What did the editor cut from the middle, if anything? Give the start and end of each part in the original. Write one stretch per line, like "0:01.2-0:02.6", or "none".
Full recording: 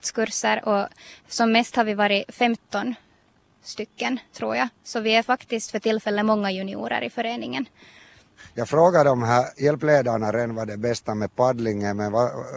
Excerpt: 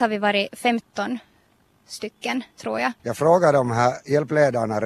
0:04.8-0:08.5

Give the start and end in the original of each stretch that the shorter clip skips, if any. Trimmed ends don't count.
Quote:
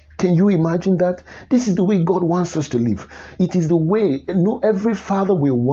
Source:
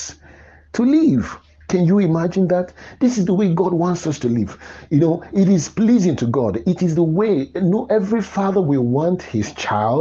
0:04.9-0:06.6

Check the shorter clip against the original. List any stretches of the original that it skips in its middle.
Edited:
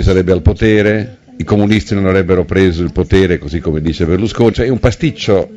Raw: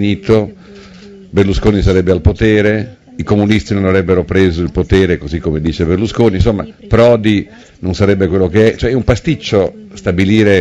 0:06.3-0:08.8

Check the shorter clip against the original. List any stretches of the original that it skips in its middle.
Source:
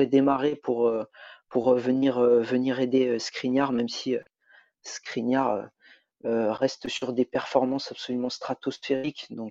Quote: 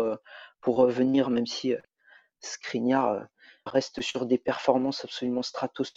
0:02.1-0:03.7
0:06.1-0:06.5

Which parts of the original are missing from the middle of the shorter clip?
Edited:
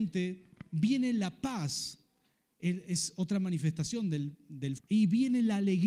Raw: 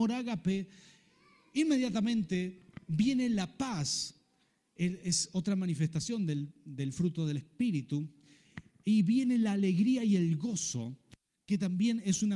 0:06.9-0:08.7

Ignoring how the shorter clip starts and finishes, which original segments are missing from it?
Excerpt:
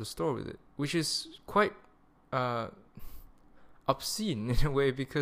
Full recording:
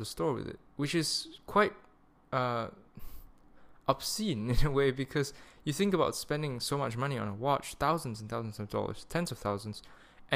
none

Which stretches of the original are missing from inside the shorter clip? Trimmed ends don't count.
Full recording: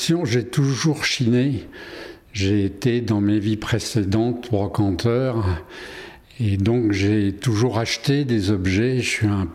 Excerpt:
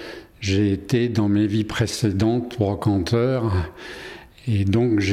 none

